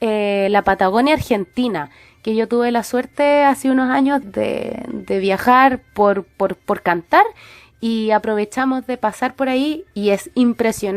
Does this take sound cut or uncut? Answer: cut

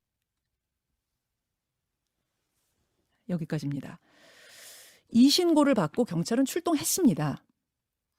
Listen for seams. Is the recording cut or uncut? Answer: uncut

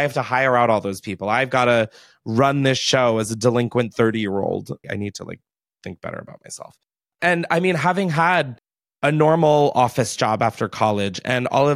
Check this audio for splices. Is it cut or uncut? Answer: cut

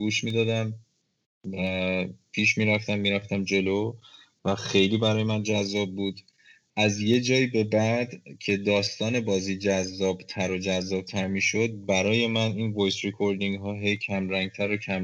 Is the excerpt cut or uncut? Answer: uncut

